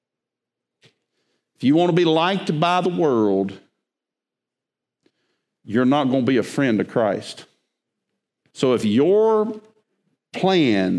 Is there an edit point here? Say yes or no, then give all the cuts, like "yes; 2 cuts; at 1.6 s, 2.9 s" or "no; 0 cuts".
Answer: yes; 1 cut; at 8.4 s